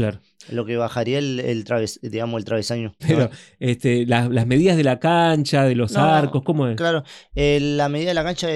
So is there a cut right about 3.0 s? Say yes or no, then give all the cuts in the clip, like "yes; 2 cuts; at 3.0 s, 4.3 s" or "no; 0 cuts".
yes; 1 cut; at 3.0 s